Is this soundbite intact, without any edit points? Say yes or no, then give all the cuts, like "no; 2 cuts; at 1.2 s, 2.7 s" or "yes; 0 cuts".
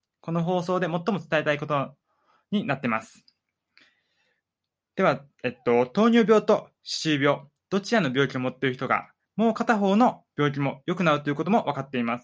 no; 1 cut; at 9.2 s